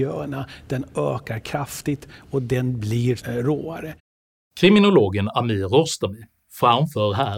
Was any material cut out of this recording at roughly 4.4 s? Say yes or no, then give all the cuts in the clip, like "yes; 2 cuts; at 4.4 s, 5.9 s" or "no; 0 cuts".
no; 1 cut; at 3.2 s